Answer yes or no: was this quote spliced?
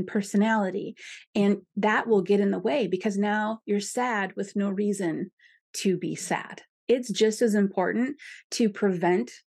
no